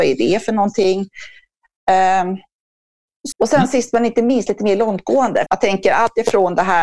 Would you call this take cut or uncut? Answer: cut